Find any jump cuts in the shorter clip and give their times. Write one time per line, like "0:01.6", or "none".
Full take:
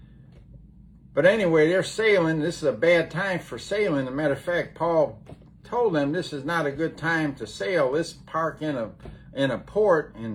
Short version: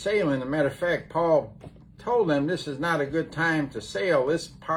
none